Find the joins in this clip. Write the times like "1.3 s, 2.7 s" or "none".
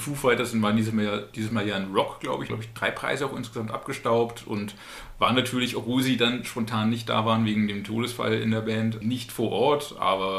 2.5 s, 9.0 s